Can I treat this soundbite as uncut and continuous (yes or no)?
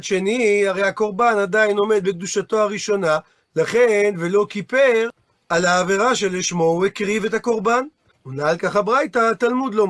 no